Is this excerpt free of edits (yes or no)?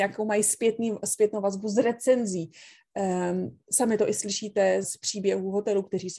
no